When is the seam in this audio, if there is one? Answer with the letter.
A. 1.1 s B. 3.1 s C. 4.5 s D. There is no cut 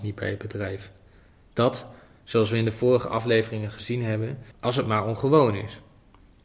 C